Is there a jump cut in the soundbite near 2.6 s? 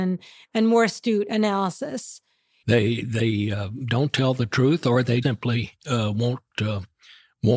yes; 2 cuts; at 2.6 s, 5.2 s

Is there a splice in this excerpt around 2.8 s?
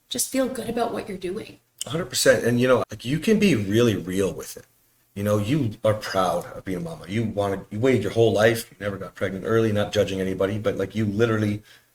yes; 1 cut; at 2.8 s

